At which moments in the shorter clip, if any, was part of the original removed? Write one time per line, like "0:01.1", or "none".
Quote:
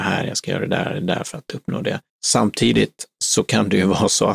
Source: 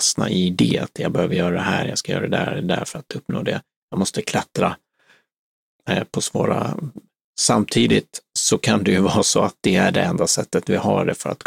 0:02.1